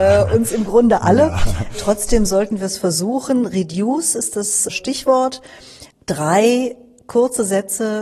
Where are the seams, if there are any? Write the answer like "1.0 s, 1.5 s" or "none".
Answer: none